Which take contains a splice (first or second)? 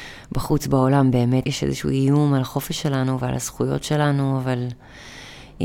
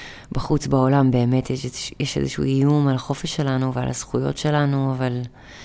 first